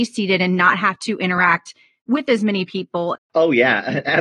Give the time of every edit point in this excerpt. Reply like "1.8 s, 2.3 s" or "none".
3.1 s